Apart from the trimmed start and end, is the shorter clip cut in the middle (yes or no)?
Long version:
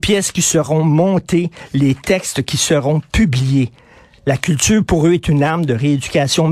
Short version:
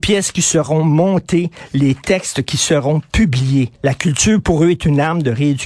yes